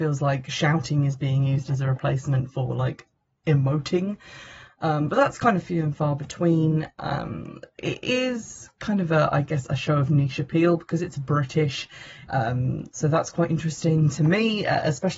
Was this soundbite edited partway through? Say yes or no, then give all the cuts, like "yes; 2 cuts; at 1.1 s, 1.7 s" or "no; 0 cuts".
yes; 1 cut; at 12.3 s